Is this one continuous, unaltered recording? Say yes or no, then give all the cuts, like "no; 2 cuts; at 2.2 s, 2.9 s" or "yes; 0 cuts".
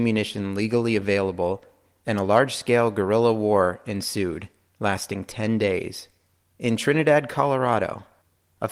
yes; 0 cuts